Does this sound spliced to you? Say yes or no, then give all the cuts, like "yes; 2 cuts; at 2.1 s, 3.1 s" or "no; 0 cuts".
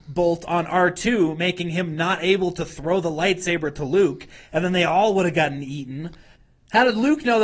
no; 0 cuts